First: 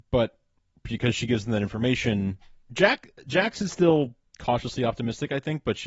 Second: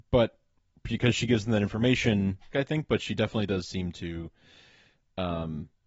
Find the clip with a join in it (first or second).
second